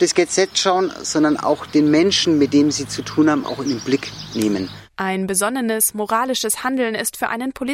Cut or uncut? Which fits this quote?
cut